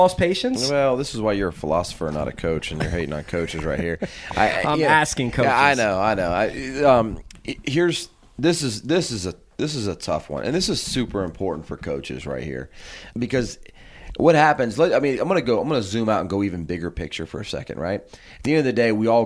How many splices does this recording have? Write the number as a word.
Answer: one